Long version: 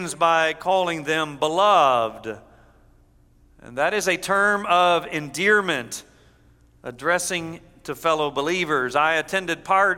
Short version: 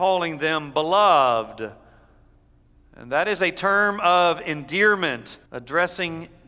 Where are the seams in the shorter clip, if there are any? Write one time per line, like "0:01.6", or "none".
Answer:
0:05.5